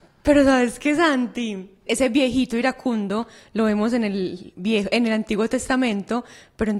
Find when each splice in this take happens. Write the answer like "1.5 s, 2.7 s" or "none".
1.9 s